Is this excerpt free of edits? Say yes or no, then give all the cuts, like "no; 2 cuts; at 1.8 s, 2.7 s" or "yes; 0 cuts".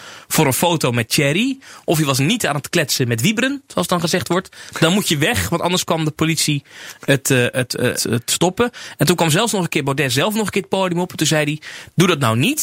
no; 1 cut; at 8.0 s